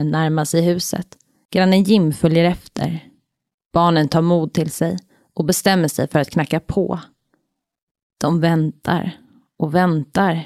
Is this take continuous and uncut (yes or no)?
yes